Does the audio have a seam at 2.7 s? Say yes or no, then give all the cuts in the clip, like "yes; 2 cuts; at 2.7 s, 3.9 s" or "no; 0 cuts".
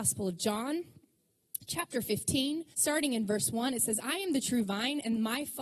yes; 1 cut; at 2.7 s